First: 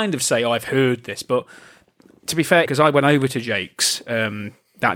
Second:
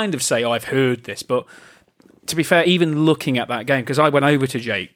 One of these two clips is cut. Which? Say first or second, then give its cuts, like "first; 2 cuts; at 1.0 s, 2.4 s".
first; 1 cut; at 2.7 s